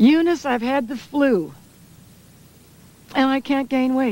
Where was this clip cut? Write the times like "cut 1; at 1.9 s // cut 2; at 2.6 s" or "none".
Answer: none